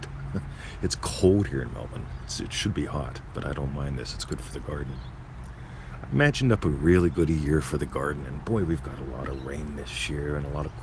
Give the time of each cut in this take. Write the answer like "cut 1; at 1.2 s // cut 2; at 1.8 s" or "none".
none